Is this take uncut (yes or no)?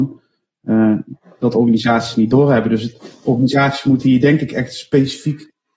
yes